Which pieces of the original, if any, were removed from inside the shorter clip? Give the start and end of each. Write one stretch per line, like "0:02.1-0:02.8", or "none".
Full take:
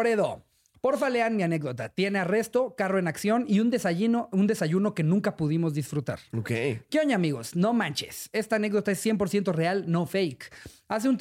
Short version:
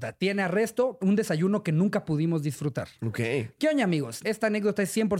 0:02.8-0:04.3
0:07.5-0:08.3